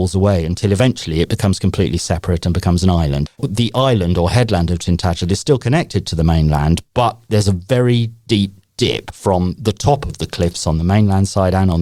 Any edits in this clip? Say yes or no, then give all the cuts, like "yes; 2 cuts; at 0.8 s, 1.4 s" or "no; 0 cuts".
yes; 1 cut; at 3.3 s